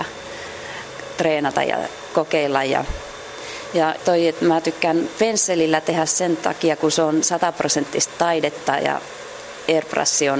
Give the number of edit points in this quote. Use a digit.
1